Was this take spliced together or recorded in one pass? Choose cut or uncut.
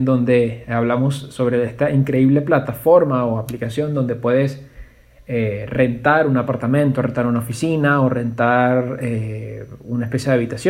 uncut